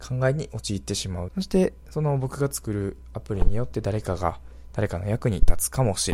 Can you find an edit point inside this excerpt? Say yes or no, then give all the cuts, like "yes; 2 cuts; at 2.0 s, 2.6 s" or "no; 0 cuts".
yes; 1 cut; at 1.3 s